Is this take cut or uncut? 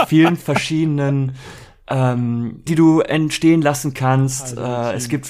cut